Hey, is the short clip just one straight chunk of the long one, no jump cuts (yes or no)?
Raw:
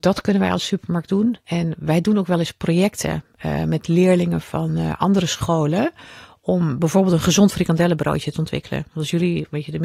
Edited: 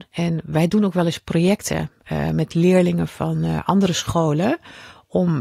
yes